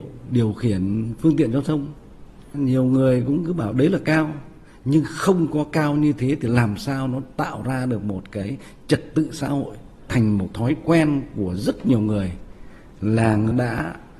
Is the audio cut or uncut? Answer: uncut